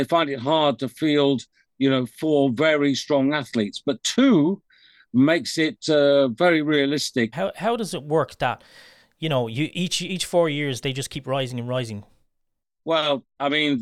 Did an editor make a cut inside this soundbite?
yes; 1 cut; at 7.3 s

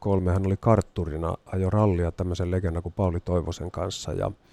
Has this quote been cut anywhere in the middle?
no; 0 cuts

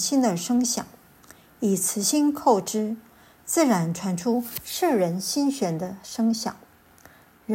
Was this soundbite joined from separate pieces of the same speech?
no; 0 cuts

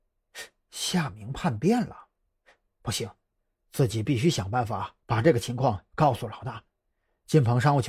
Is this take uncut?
yes; 0 cuts

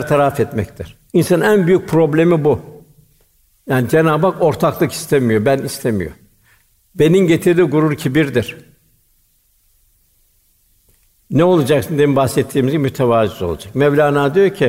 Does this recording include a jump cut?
yes; 1 cut; at 1.1 s

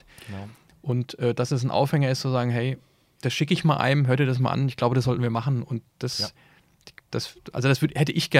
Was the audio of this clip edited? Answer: no; 0 cuts

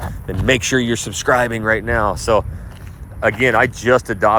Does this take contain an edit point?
no; 0 cuts

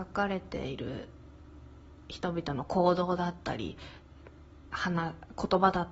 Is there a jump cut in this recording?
no; 0 cuts

